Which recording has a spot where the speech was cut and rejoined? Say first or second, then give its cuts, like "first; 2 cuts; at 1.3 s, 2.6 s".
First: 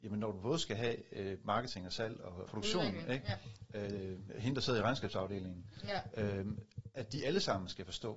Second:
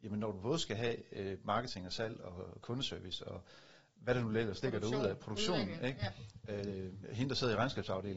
first; 1 cut; at 2.4 s